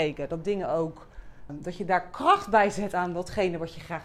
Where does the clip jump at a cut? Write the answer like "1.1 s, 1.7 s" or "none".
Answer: 1.5 s